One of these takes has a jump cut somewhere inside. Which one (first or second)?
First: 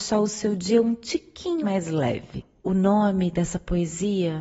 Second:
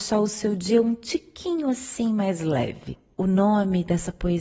first